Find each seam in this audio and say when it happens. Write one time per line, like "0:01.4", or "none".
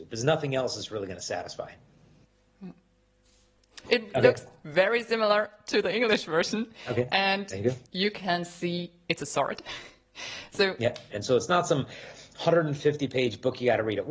0:03.9
0:11.1